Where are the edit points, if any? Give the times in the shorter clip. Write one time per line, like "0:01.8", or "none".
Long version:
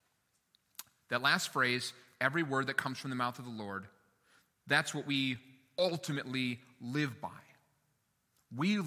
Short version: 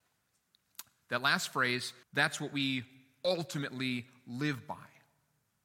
0:02.0